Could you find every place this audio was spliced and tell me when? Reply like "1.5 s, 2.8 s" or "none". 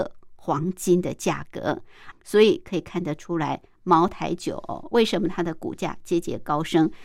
2.1 s